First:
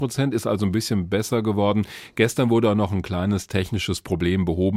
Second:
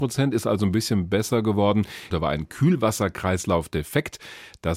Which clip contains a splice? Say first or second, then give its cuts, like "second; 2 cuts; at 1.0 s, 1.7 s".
second; 1 cut; at 2.1 s